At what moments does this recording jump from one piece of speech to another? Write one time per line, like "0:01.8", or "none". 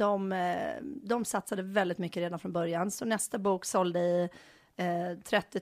none